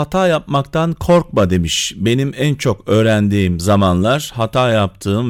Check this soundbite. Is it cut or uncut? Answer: uncut